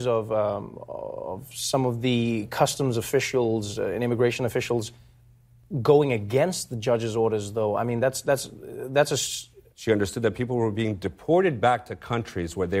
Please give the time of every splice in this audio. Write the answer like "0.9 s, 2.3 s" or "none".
9.7 s